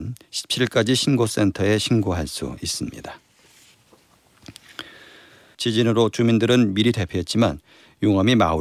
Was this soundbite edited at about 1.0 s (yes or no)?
no